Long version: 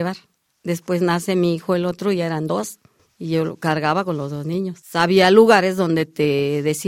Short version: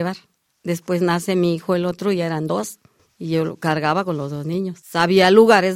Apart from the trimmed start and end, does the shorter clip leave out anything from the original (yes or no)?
no